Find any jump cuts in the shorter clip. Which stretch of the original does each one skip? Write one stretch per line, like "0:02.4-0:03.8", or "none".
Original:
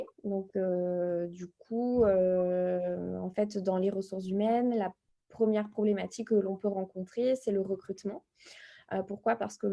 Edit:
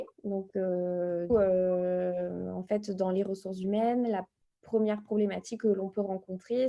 0:01.3-0:02.0